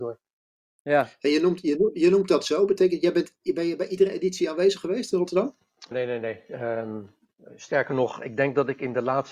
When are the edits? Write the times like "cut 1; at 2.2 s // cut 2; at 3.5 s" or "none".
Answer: cut 1; at 5.9 s